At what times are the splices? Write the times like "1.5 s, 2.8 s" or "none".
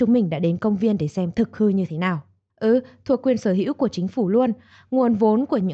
2.5 s